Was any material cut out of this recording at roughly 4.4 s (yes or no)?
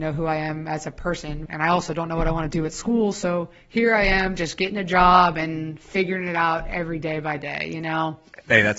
no